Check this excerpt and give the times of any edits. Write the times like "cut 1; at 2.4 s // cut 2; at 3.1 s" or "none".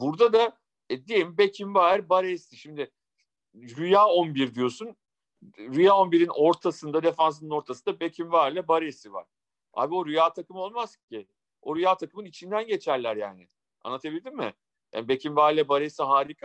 none